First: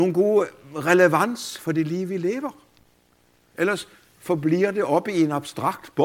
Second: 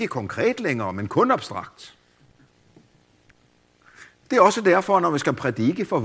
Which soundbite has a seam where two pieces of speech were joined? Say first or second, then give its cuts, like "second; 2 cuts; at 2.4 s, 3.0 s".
second; 1 cut; at 4.2 s